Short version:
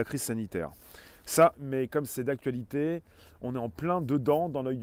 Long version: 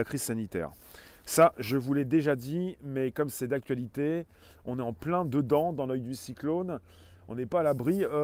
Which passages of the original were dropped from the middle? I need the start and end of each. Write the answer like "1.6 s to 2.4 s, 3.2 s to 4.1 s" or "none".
1.5 s to 2.8 s